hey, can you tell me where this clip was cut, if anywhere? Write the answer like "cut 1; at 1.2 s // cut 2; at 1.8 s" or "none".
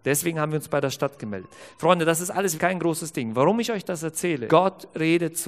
cut 1; at 2.5 s // cut 2; at 4.5 s